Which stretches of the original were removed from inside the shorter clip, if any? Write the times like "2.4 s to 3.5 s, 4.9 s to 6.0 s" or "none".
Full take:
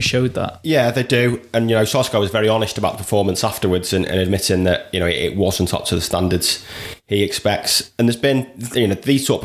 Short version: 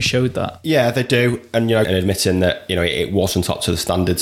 1.8 s to 4.1 s